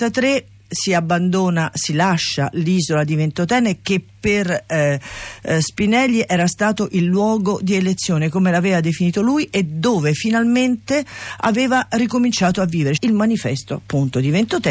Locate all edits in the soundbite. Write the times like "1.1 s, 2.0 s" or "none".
13.0 s